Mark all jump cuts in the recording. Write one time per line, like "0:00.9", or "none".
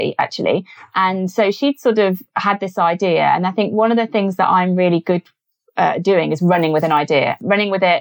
none